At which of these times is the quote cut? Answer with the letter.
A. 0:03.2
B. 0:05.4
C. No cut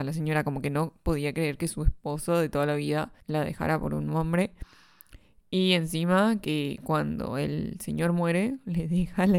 A